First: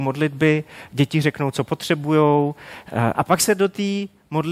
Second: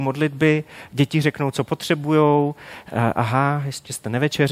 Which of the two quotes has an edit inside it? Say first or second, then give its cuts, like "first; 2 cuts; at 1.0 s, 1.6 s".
first; 1 cut; at 3.1 s